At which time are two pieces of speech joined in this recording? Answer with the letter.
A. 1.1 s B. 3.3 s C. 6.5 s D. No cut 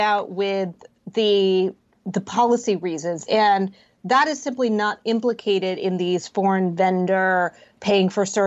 B